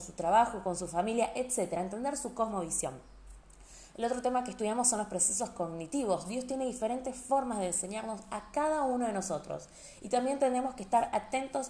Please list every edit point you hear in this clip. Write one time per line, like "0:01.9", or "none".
none